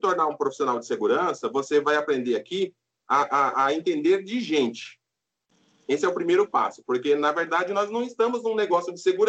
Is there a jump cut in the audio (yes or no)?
no